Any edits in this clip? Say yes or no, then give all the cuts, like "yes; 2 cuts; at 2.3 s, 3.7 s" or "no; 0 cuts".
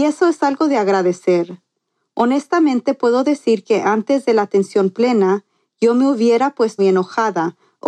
yes; 1 cut; at 6.8 s